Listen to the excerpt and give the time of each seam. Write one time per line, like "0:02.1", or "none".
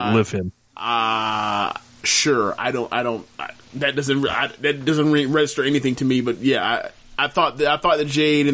none